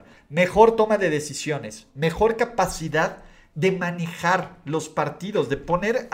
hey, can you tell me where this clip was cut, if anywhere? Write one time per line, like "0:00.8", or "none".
none